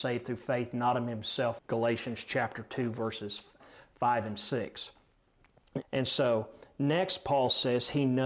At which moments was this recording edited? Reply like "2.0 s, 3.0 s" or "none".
1.6 s, 5.8 s